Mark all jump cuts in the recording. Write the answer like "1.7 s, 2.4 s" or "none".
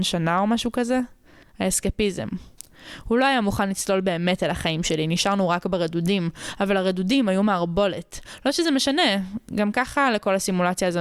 1.4 s